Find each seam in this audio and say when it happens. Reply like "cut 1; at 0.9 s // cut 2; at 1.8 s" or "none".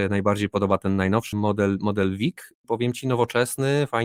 cut 1; at 1.3 s // cut 2; at 2.6 s